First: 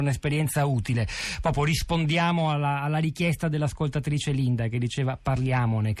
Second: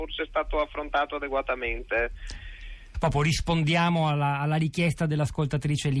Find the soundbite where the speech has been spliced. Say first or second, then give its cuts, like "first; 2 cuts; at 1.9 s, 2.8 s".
second; 1 cut; at 2.9 s